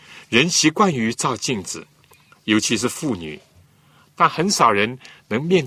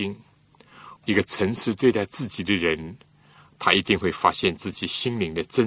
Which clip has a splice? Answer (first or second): second